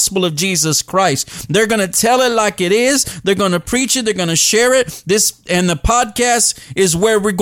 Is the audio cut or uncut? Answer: uncut